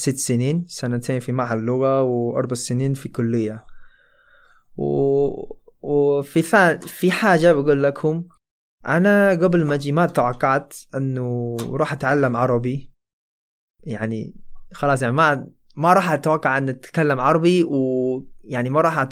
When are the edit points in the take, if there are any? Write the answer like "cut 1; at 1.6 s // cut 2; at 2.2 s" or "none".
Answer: none